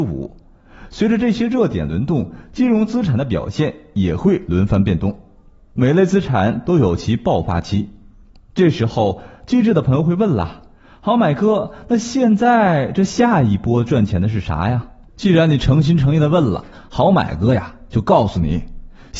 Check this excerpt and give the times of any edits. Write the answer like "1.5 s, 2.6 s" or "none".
none